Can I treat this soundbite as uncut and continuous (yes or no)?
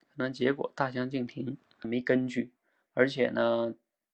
no